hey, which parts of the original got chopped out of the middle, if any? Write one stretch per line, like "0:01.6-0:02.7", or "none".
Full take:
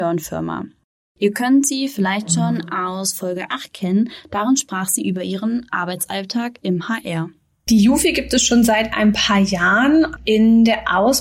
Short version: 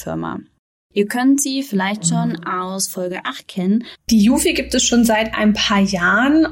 0:04.2-0:07.5